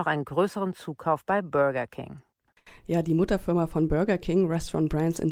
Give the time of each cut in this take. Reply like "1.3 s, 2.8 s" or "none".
none